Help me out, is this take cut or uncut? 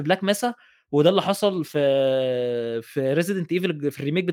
uncut